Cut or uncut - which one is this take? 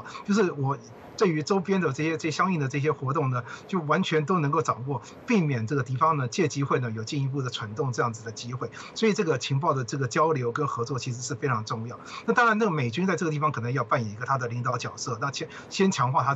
uncut